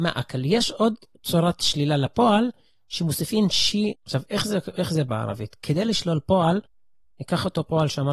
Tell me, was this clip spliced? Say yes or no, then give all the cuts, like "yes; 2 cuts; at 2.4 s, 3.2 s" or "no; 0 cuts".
yes; 1 cut; at 3.9 s